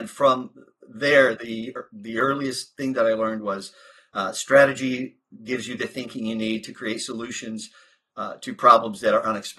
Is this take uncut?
yes; 0 cuts

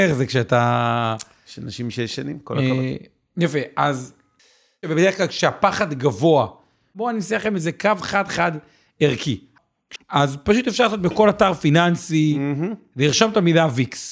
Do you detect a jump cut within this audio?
yes; 1 cut; at 10.0 s

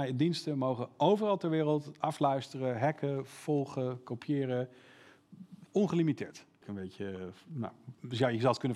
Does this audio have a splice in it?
yes; 1 cut; at 6.6 s

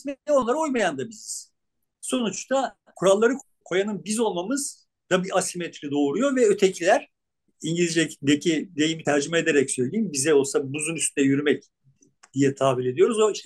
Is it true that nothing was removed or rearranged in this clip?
yes; 0 cuts

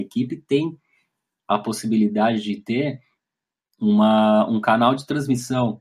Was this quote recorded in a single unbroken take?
yes; 0 cuts

